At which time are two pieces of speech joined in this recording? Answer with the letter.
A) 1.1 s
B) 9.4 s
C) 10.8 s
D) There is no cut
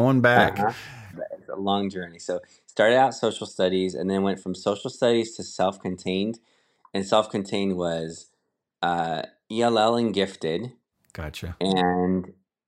A